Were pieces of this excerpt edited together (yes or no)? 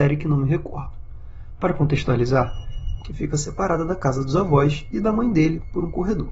yes